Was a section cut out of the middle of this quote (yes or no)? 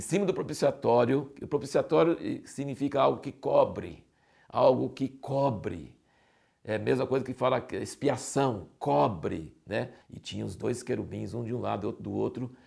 yes